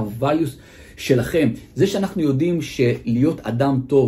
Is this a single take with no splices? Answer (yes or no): yes